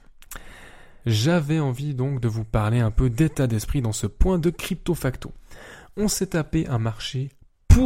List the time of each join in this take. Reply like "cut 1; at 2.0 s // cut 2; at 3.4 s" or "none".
cut 1; at 1.0 s